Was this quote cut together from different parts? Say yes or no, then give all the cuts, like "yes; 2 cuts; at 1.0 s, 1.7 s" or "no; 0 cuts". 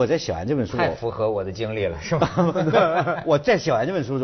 no; 0 cuts